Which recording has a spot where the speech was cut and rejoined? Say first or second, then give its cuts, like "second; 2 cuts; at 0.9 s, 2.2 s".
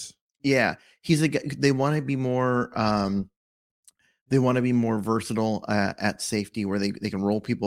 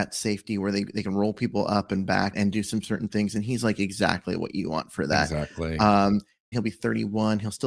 second; 2 cuts; at 2.3 s, 6.5 s